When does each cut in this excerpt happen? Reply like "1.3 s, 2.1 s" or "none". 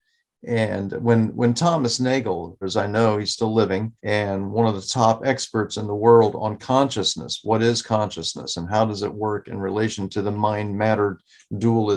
2.6 s, 4.0 s